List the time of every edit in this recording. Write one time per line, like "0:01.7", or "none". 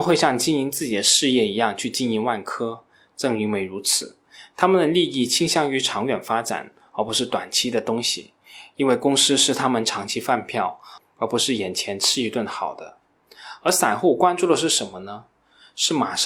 none